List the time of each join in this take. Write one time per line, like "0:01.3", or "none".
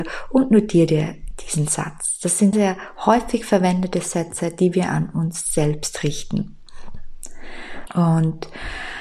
0:02.5
0:07.9